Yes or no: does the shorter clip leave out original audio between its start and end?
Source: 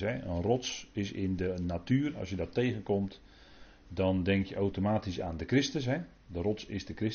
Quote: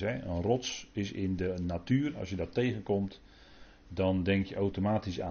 no